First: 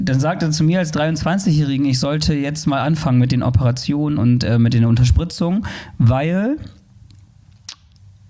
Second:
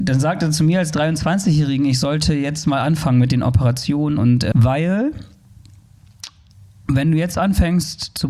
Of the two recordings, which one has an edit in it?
second; 1 cut; at 4.5 s

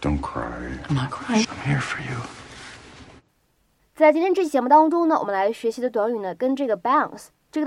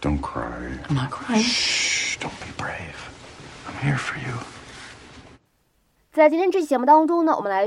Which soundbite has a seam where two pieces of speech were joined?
first; 1 cut; at 1.4 s

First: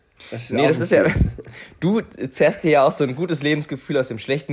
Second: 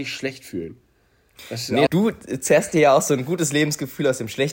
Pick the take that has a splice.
second; 1 cut; at 1.9 s

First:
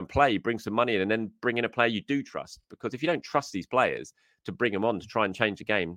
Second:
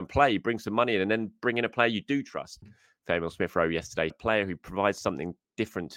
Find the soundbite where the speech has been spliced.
second; 2 cuts; at 2.6 s, 4.1 s

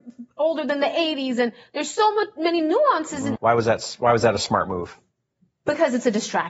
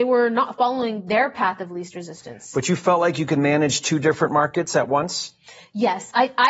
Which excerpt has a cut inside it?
first; 1 cut; at 3.4 s

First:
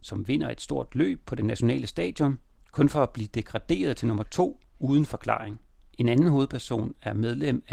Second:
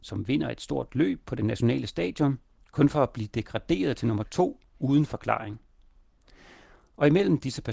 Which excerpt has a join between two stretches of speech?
first; 1 cut; at 5.9 s

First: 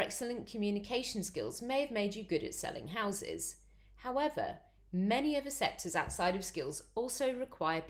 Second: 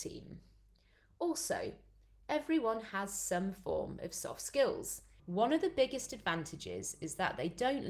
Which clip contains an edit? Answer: second; 1 cut; at 5.2 s

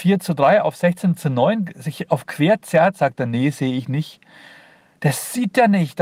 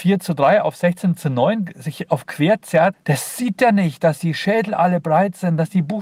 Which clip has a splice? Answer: second; 1 cut; at 2.9 s

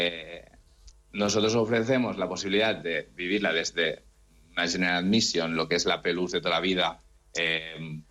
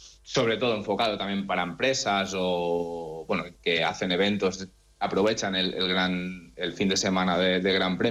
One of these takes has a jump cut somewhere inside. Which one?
first; 1 cut; at 0.9 s

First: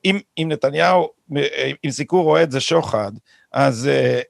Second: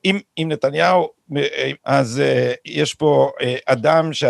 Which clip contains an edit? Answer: second; 1 cut; at 1.8 s

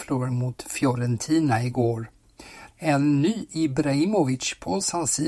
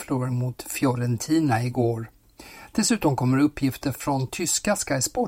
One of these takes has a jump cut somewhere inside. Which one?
first; 1 cut; at 2.7 s

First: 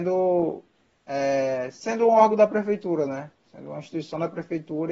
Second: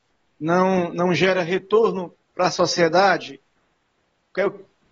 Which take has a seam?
second; 1 cut; at 2.2 s

